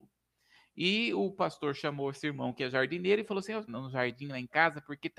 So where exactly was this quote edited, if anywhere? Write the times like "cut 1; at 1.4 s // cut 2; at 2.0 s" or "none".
cut 1; at 3.7 s